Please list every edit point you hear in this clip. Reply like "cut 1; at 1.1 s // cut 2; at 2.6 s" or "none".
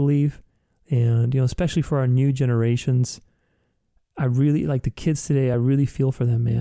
none